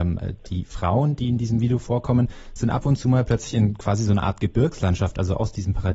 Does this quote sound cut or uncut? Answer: uncut